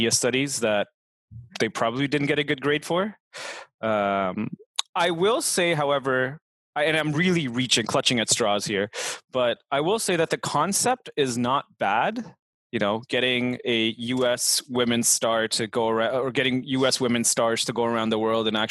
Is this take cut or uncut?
uncut